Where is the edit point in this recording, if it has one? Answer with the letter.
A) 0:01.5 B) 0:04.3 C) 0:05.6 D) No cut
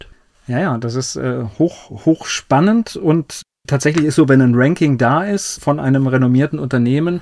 C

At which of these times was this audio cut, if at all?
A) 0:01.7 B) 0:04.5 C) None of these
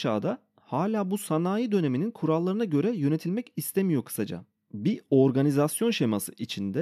C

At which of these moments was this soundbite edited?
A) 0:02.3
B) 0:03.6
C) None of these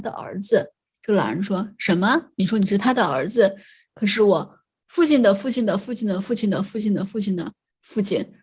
C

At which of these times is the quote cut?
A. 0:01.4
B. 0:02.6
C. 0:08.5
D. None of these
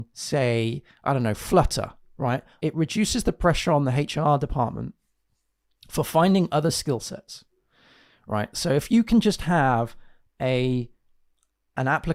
B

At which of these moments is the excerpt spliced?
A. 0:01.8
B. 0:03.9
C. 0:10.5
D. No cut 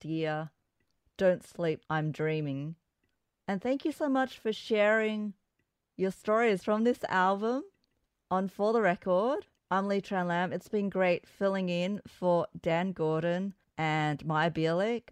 A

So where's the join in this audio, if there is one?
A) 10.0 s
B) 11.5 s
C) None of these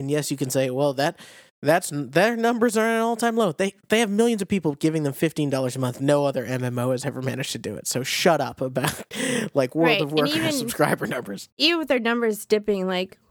B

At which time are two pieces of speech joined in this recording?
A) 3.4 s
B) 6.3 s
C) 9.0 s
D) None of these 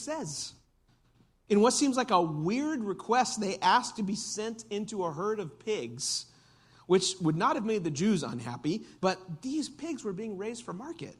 C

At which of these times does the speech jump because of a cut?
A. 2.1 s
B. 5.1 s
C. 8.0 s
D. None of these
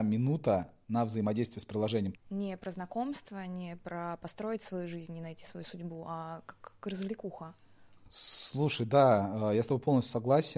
A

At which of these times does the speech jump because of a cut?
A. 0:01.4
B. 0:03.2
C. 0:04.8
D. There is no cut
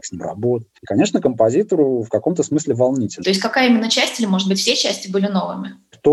B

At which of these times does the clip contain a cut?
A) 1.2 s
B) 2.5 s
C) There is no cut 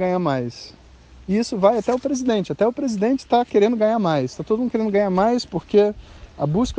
C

